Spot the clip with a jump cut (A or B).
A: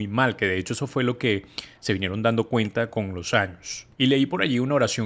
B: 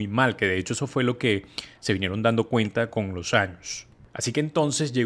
A